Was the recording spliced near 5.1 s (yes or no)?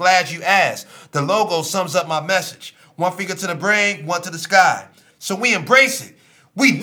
yes